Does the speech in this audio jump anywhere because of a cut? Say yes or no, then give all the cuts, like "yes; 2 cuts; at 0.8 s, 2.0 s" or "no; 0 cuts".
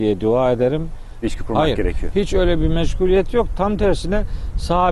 yes; 1 cut; at 1.2 s